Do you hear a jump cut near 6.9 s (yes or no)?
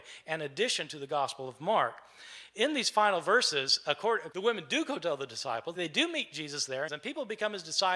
yes